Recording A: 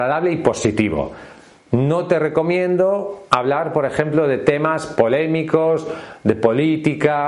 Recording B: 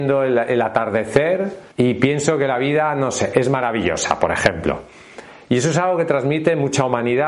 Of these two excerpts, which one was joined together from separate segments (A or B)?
B